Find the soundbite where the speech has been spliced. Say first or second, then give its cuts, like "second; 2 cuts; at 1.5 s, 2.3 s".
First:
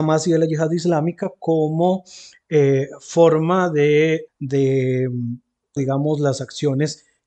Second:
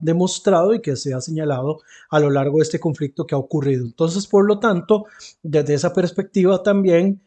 first; 2 cuts; at 4.3 s, 5.8 s